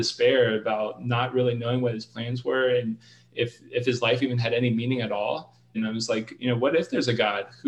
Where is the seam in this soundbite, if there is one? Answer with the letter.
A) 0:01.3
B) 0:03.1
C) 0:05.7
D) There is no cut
C